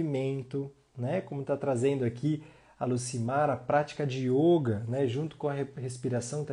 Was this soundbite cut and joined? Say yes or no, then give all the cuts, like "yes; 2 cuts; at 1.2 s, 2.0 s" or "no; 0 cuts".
no; 0 cuts